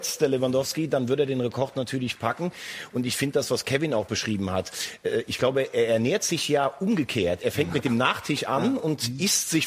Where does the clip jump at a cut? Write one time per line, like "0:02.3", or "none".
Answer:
none